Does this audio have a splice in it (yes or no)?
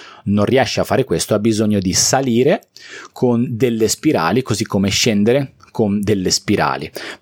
no